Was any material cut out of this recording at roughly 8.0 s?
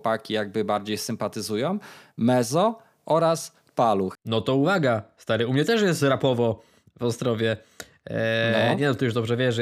no; 1 cut; at 4.2 s

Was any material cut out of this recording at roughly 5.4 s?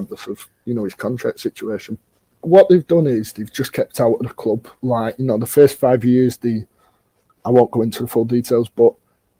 no; 1 cut; at 2.4 s

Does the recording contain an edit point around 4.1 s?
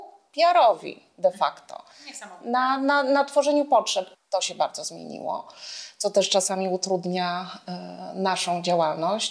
yes; 1 cut; at 4.1 s

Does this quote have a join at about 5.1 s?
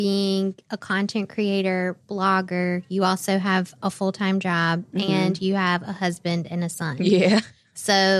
no; 0 cuts

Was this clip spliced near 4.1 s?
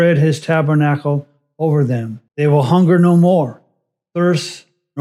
no; 1 cut; at 2.3 s

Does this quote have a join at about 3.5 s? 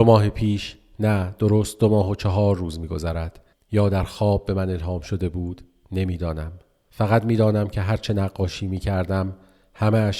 yes; 1 cut; at 3.5 s

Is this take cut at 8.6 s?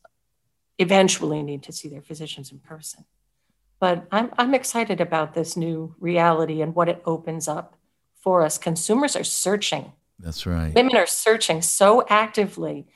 no; 0 cuts

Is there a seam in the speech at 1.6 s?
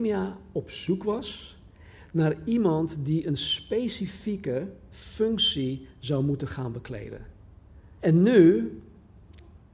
no; 1 cut; at 8.0 s

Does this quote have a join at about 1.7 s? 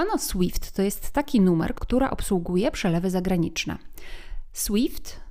yes; 1 cut; at 1.7 s

